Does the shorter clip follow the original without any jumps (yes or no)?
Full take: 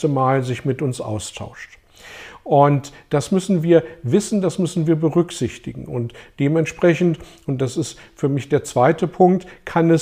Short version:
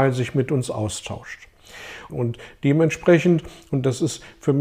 no